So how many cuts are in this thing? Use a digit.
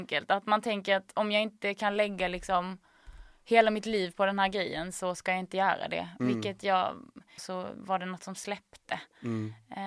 1